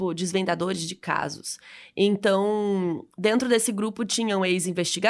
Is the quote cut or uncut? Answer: uncut